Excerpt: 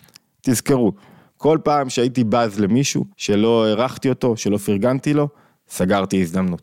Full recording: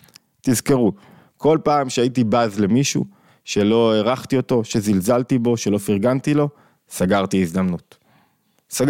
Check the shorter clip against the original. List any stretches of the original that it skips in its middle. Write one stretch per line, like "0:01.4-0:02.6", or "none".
0:03.1-0:03.4
0:04.7-0:05.6

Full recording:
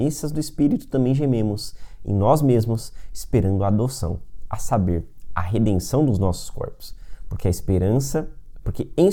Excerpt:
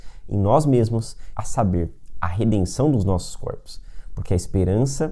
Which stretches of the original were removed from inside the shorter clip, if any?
0:03.1-0:04.5

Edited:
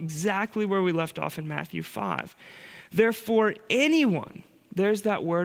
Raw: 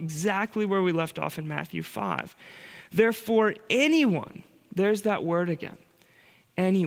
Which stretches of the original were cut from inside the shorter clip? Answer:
none

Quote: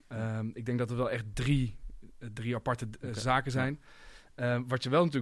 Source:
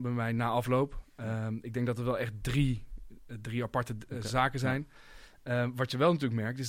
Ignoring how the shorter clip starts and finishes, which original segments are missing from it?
none

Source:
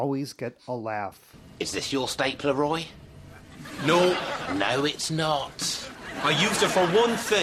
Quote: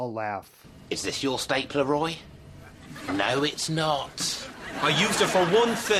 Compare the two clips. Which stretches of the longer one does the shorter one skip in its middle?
0:03.8-0:04.5

